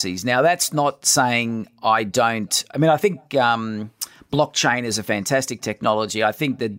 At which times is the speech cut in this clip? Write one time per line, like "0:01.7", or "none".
none